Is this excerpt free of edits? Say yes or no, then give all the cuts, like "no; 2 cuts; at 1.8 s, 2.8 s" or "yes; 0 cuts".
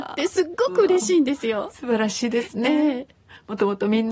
yes; 0 cuts